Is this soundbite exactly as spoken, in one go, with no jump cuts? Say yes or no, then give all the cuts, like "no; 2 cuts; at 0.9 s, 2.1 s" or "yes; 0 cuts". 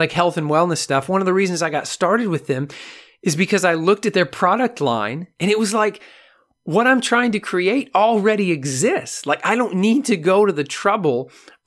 yes; 0 cuts